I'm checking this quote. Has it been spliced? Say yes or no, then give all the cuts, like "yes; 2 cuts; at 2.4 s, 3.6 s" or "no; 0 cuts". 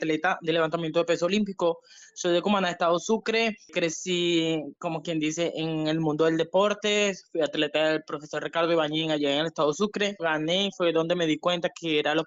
yes; 1 cut; at 10.2 s